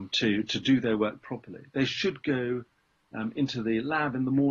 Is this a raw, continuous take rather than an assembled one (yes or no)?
yes